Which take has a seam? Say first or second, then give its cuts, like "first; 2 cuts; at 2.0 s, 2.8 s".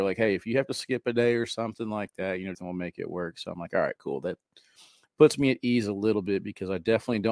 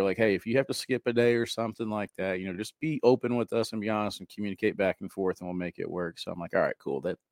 first; 1 cut; at 2.5 s